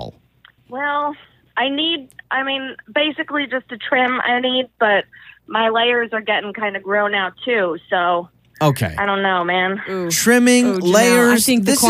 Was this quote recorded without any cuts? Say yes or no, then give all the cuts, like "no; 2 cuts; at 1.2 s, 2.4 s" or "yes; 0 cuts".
yes; 0 cuts